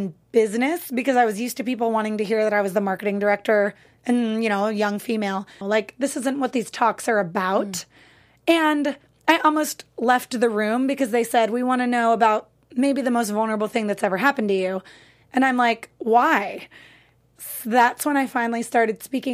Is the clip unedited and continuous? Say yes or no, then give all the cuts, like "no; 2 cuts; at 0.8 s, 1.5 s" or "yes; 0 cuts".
no; 1 cut; at 5.6 s